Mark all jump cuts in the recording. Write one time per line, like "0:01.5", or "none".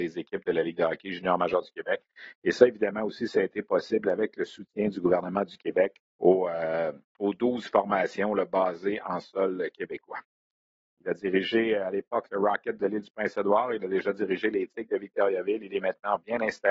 0:06.1
0:10.8